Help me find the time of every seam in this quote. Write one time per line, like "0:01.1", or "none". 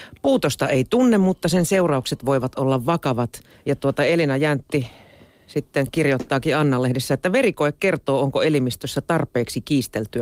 0:03.5